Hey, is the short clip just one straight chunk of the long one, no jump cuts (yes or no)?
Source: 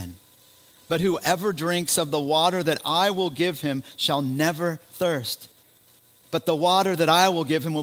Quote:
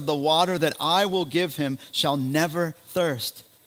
yes